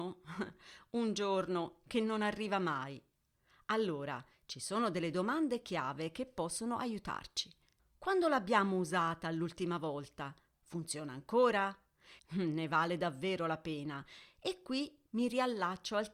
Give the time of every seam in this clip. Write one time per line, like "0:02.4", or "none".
0:07.8
0:12.2

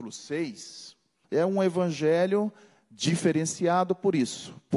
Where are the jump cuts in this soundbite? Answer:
0:01.2

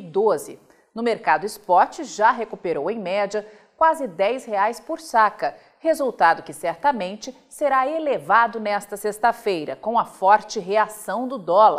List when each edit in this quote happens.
none

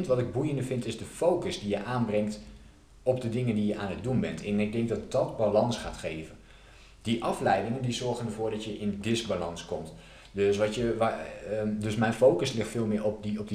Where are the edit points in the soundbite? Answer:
none

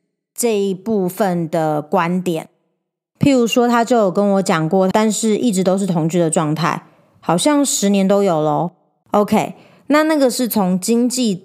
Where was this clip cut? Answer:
0:04.9
0:09.0

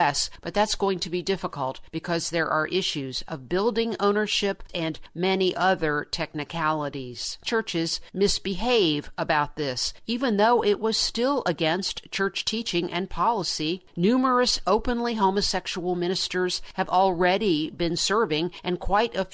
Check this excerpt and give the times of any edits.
0:04.7
0:07.4

